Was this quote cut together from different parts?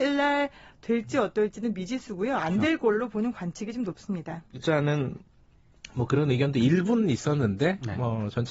yes; 1 cut; at 4.6 s

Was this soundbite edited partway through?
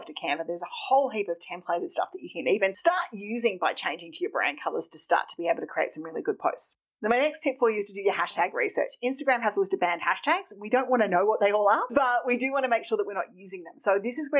no; 0 cuts

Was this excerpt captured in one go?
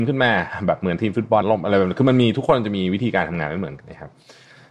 no; 2 cuts; at 1.4 s, 3.8 s

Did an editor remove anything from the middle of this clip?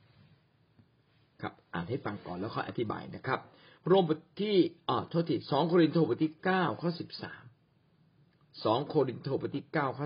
no; 0 cuts

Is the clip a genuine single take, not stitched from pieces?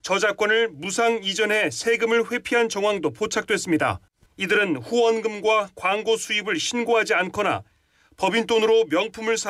no; 1 cut; at 4.3 s

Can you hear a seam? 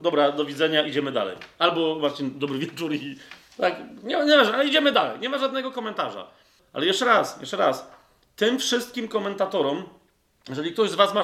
yes; 1 cut; at 6.6 s

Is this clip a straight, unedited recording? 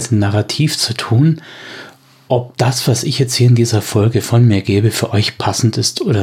yes; 0 cuts

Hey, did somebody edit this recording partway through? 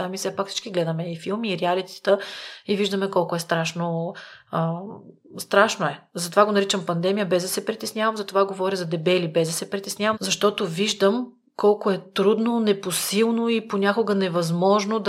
yes; 1 cut; at 10.1 s

